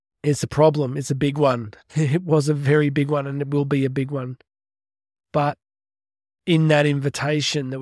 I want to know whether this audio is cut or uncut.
uncut